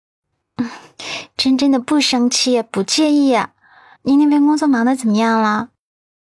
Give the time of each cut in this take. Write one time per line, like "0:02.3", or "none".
0:04.0